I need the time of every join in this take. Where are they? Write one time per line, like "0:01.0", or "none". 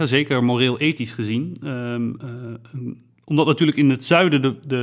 none